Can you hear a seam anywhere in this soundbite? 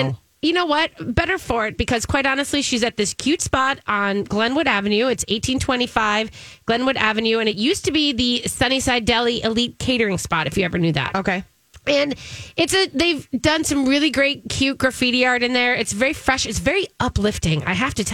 no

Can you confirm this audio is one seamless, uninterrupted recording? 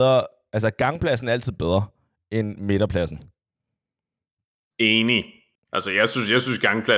yes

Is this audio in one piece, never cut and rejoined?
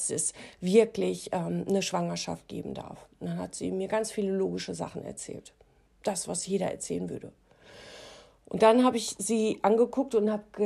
yes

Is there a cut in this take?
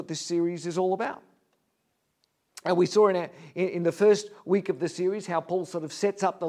no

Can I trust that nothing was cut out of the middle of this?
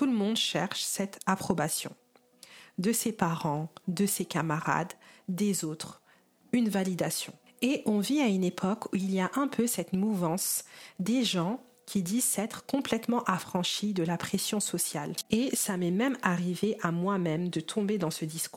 yes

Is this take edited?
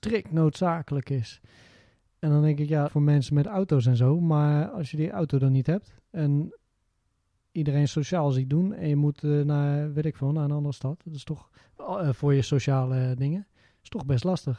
yes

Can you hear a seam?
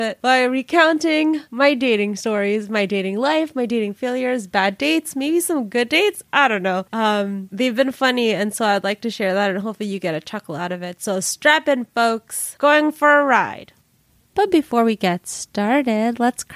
no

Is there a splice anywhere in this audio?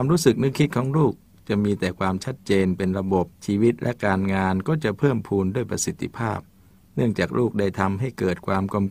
yes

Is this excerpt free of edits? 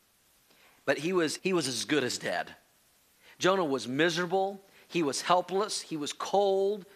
no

